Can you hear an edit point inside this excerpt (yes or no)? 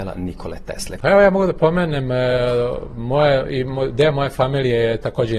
yes